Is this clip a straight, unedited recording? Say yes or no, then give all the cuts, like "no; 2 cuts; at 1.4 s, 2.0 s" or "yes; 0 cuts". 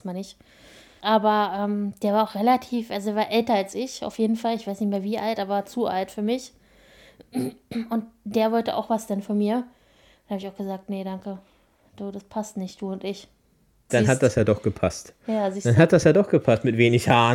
no; 2 cuts; at 1.0 s, 13.9 s